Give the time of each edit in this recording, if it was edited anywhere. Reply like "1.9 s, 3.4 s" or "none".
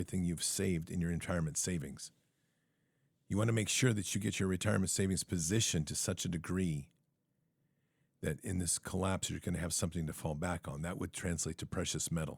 none